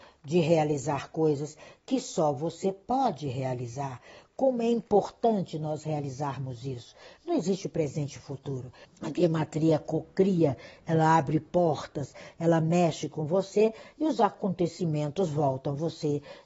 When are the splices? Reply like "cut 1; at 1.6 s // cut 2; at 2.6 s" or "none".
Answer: cut 1; at 7.2 s // cut 2; at 8.8 s